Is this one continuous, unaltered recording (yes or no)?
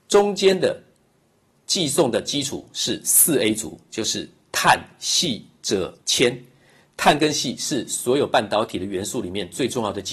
no